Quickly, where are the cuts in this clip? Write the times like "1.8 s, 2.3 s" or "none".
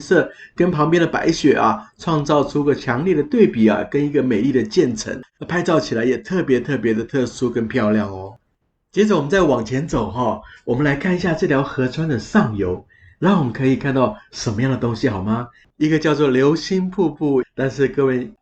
15.7 s, 17.4 s